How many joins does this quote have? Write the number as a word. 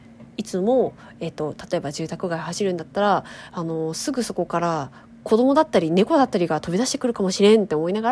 zero